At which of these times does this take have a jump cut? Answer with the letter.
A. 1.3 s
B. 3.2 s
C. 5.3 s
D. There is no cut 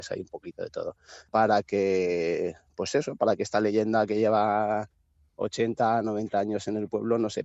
A